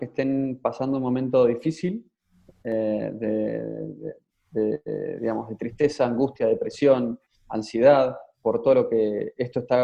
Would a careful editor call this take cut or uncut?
uncut